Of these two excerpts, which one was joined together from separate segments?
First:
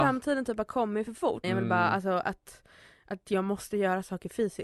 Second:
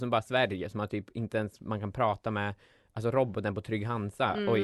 first; 1 cut; at 1.4 s

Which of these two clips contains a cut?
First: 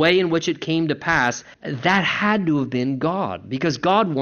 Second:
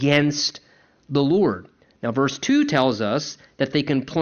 first; 1 cut; at 1.5 s

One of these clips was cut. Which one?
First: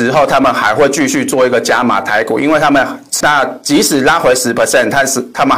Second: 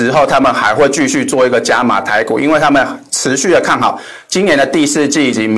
first; 1 cut; at 3.2 s

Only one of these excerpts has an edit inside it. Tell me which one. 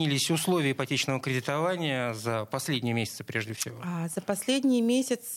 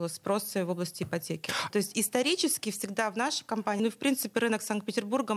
second; 2 cuts; at 1.7 s, 3.8 s

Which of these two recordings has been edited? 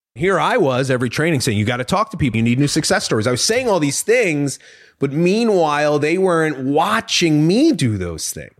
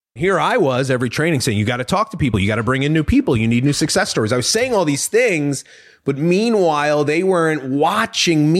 first; 1 cut; at 2.3 s

